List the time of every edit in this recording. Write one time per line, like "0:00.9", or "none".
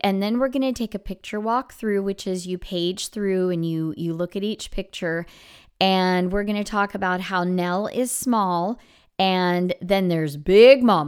none